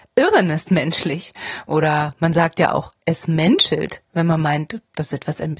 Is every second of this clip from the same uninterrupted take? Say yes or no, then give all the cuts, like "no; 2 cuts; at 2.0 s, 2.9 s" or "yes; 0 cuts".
yes; 0 cuts